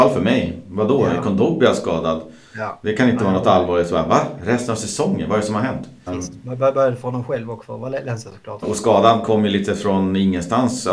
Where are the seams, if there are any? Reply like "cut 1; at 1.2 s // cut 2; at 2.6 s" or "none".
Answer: cut 1; at 6.1 s // cut 2; at 8.6 s